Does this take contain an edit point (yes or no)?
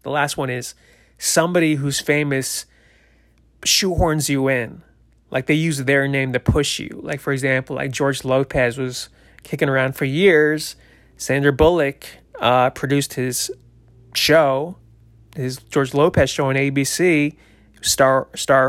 no